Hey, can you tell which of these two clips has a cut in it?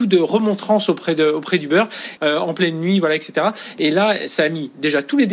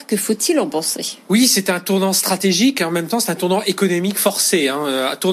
first; 1 cut; at 2.2 s

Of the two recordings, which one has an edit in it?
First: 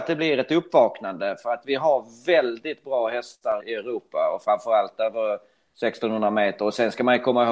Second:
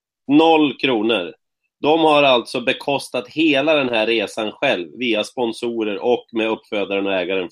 first; 1 cut; at 3.6 s

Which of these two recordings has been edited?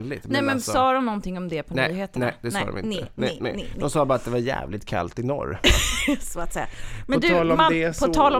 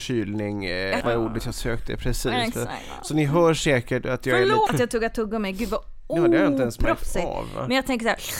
second; 2 cuts; at 1.0 s, 4.7 s

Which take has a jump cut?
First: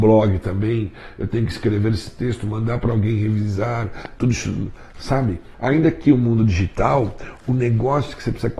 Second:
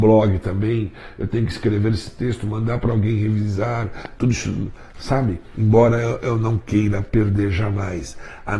first; 1 cut; at 5.5 s

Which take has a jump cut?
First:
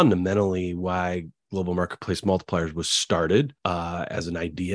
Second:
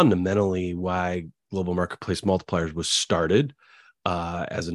first; 1 cut; at 3.6 s

